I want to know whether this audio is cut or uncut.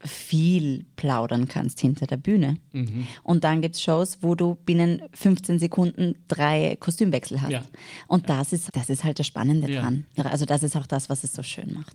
cut